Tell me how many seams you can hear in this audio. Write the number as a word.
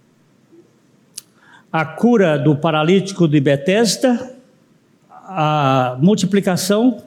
two